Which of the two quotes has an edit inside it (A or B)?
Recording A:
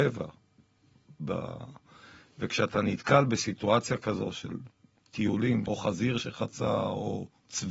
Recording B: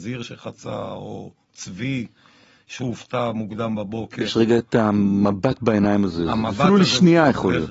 A